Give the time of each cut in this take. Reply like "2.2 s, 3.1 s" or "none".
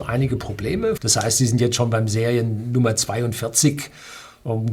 1.0 s